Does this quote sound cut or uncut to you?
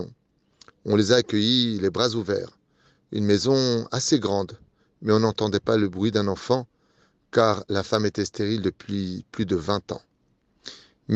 uncut